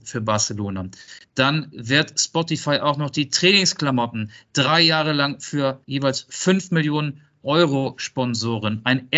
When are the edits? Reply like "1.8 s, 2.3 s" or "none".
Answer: 1.2 s, 5.8 s